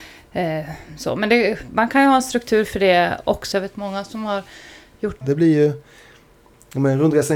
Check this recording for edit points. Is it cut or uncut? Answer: cut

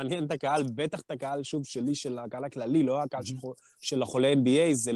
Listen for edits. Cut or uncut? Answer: uncut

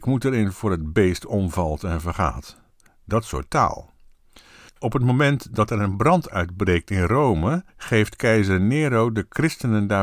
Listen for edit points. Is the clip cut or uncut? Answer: cut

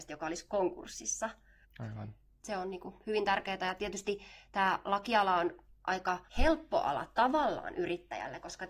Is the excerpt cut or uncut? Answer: cut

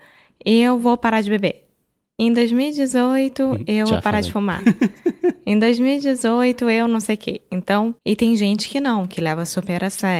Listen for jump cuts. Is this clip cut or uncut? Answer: cut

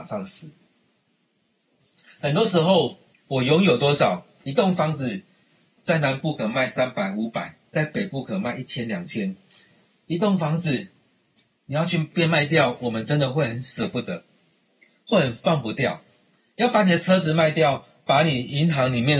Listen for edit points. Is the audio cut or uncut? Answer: cut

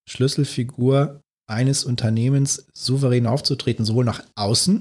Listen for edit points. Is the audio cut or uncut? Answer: uncut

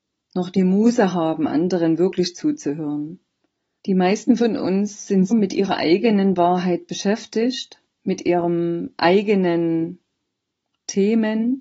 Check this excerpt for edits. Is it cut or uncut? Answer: cut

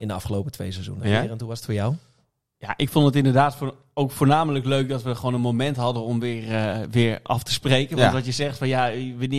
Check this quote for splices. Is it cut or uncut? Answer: uncut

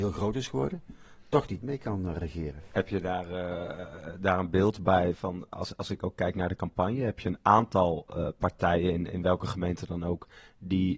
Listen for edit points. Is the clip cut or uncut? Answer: cut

